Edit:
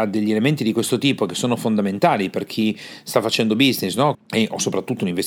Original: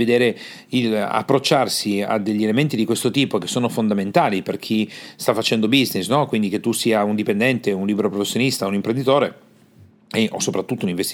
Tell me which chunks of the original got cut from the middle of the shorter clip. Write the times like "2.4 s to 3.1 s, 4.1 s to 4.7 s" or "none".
6.3 s to 10.0 s

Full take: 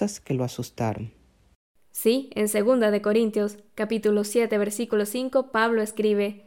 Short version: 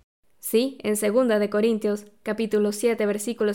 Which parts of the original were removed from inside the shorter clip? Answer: none

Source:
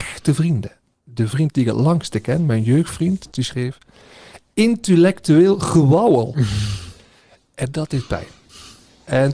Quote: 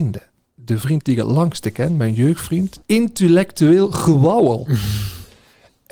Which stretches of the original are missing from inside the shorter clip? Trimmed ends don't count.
3.3 s to 4.5 s

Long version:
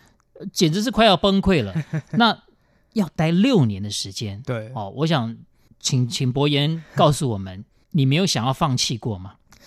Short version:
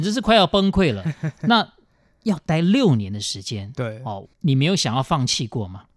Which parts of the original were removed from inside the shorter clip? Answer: 4.9 s to 7.7 s

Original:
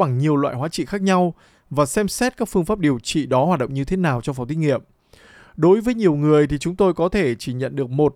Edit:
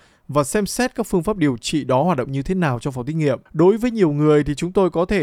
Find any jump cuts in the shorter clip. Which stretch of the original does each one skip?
4.9 s to 5.5 s

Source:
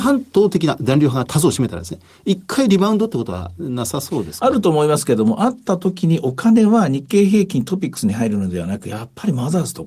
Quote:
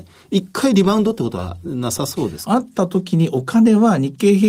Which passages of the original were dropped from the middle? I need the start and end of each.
4.4 s to 5.4 s

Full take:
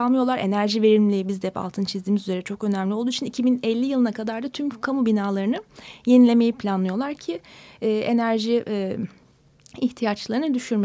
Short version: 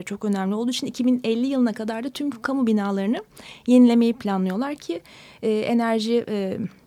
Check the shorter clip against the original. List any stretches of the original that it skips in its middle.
none

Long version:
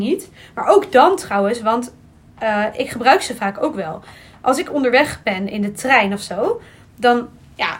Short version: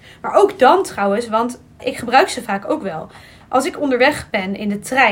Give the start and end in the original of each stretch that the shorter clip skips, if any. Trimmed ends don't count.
2.1 s to 2.7 s

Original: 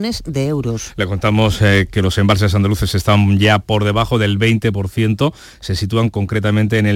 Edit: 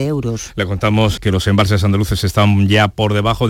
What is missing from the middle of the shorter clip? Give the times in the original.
1.6 s to 1.9 s

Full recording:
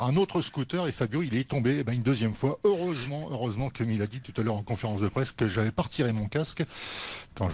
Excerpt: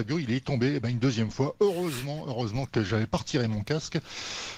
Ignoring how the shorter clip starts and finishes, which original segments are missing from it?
3.7 s to 5.3 s

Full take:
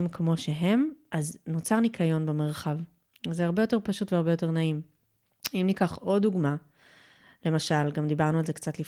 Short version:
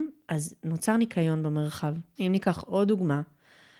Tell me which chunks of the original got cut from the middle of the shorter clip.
3.0 s to 5.5 s

